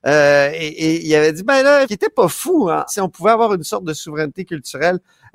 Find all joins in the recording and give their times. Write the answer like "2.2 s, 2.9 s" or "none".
1.8 s, 2.9 s